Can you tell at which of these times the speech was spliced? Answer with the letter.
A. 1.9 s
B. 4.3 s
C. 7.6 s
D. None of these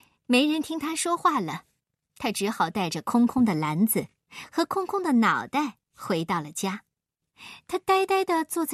D